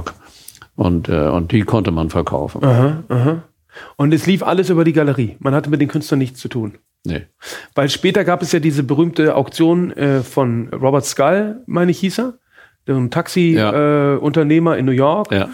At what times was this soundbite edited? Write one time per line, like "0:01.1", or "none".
0:10.7

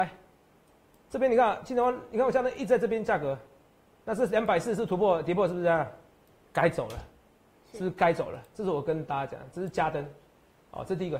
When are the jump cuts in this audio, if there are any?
none

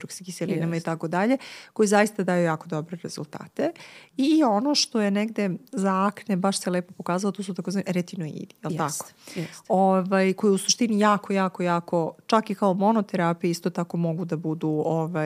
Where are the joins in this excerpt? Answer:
none

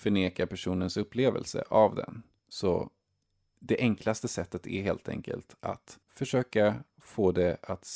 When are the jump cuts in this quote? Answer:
0:02.4
0:06.0

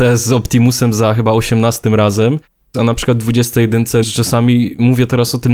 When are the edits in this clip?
0:02.7
0:04.0

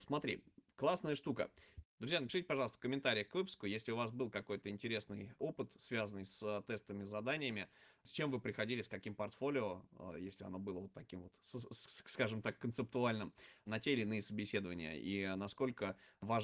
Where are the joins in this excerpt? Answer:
0:01.8

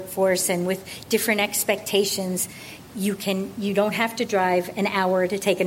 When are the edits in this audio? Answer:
none

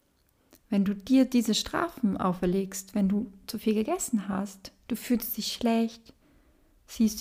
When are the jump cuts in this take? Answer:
none

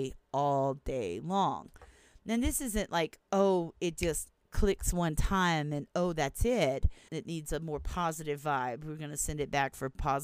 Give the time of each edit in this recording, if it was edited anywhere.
0:07.1

